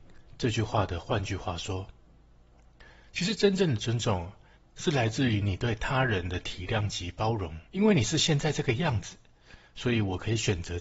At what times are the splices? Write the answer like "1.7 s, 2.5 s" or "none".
7.7 s